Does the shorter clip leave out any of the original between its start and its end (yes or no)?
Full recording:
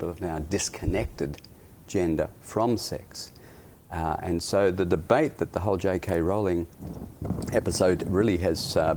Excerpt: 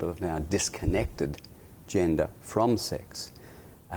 no